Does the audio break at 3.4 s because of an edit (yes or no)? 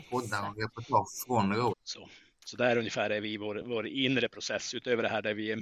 no